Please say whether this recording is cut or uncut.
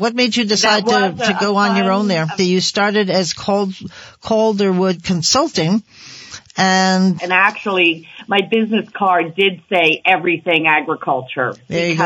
cut